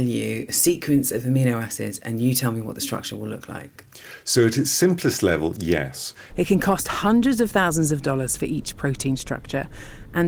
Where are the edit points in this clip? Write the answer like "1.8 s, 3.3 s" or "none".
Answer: 6.3 s

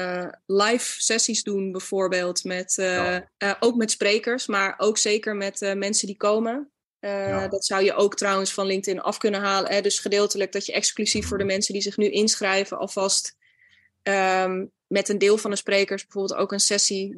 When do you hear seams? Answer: 3.3 s

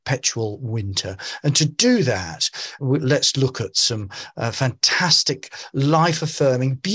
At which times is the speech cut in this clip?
2.8 s

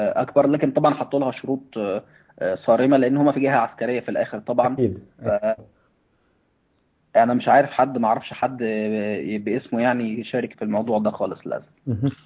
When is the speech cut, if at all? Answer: 5.6 s, 10.5 s

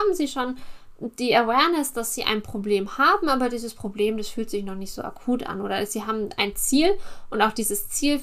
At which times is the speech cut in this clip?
none

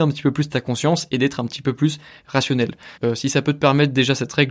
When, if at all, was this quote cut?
3.0 s

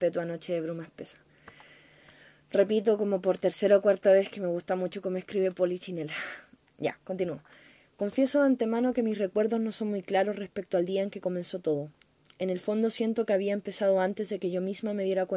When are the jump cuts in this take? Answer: none

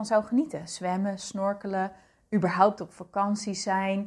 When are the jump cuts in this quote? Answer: none

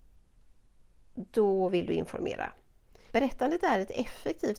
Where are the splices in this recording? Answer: 3.1 s

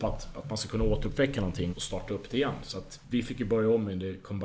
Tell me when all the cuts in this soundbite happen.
1.7 s

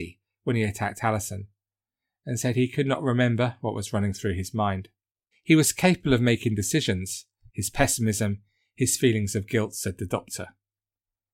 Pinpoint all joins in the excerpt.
5.3 s, 7.5 s

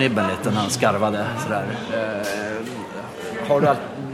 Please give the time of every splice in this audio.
none

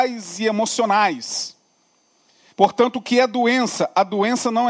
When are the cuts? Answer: 2.5 s

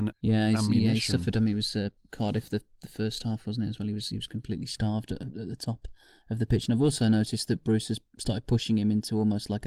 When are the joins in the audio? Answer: none

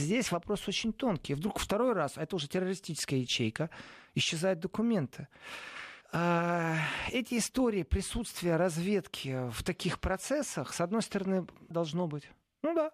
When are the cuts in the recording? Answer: 6.0 s, 11.7 s

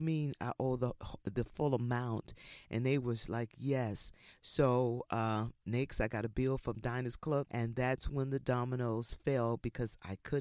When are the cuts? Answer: 7.4 s

